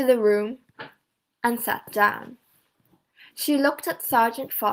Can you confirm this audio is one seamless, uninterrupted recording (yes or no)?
yes